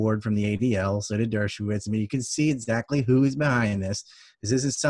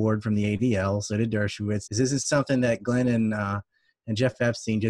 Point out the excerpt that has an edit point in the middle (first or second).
second